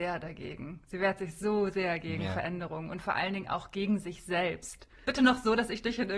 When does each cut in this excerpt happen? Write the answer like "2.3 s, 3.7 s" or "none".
5.0 s